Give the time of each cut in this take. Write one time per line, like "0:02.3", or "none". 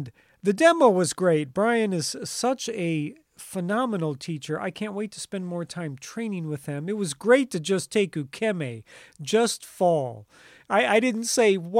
none